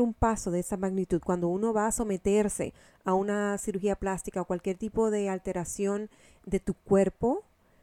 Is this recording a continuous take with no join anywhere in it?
yes; 0 cuts

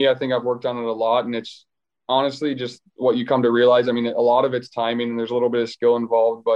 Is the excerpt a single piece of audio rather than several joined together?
no; 1 cut; at 2.9 s

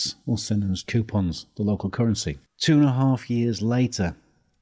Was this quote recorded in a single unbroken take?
no; 1 cut; at 2.5 s

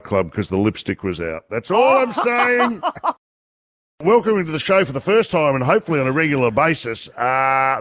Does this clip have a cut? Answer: no; 0 cuts

